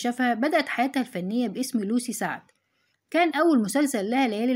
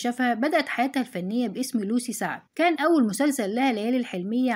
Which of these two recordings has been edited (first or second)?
second